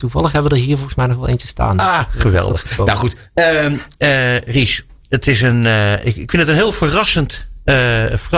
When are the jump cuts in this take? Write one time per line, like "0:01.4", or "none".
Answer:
none